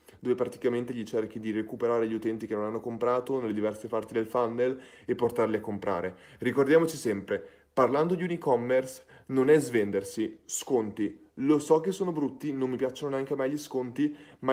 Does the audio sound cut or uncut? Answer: uncut